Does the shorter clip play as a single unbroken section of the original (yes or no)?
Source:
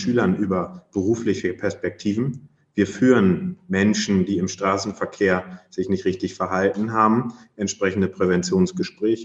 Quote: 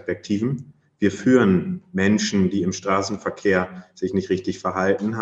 yes